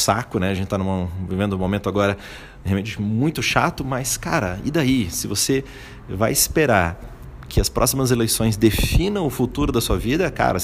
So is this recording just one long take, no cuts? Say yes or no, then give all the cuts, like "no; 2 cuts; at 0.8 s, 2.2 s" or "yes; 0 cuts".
yes; 0 cuts